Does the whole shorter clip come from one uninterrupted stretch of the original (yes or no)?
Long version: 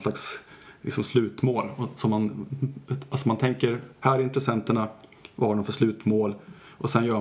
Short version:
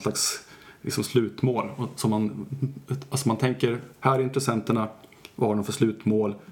yes